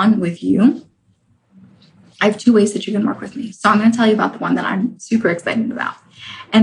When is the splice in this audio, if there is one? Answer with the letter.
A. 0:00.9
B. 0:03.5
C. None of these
C